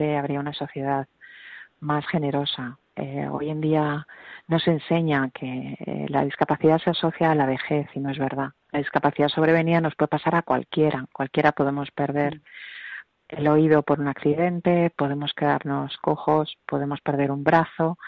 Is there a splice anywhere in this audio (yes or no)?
yes